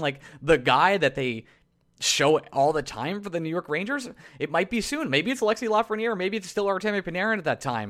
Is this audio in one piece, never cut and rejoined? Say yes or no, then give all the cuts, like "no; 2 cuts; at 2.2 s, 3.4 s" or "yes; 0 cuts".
yes; 0 cuts